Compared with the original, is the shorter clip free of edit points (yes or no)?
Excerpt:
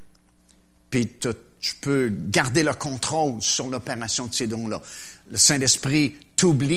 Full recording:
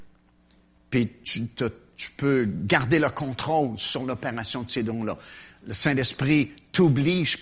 no